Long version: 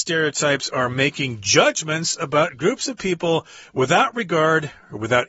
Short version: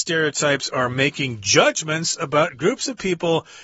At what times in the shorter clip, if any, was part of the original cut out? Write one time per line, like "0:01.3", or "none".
none